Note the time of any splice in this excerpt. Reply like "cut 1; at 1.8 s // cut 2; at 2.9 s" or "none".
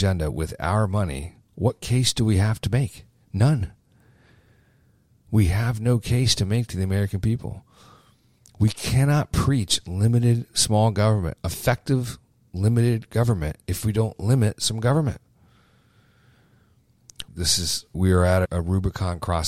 cut 1; at 17.3 s